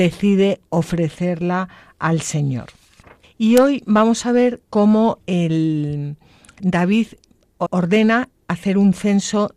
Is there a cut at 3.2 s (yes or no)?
yes